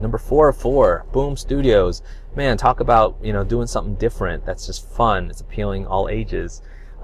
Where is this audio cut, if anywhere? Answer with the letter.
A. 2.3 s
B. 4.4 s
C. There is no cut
C